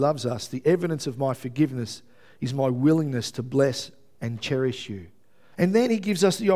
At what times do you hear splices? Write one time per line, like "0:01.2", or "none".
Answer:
0:05.5